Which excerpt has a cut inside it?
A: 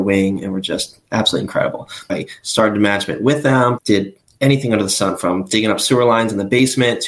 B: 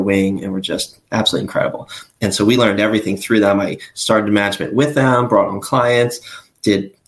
A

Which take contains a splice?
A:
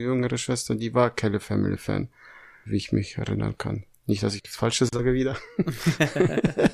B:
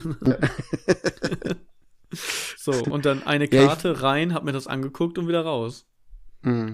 A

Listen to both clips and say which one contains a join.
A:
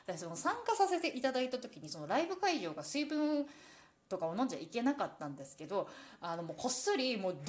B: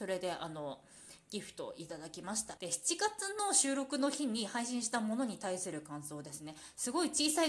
B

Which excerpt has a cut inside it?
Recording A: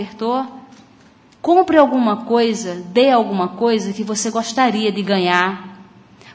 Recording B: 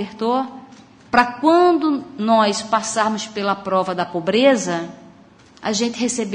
B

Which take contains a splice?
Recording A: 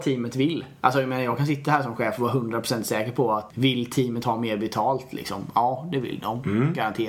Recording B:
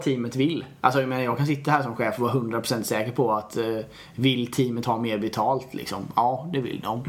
A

